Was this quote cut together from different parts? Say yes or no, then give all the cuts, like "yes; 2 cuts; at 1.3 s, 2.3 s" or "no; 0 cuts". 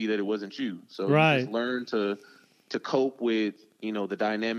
no; 0 cuts